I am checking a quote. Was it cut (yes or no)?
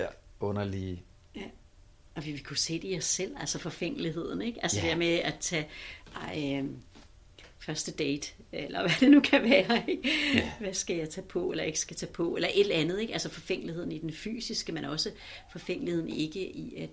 no